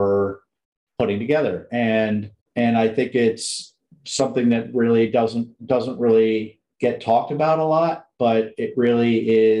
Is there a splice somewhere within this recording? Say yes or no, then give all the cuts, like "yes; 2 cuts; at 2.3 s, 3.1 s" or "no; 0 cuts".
yes; 2 cuts; at 2.4 s, 5.6 s